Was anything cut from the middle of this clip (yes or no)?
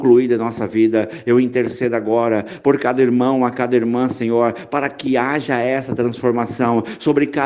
no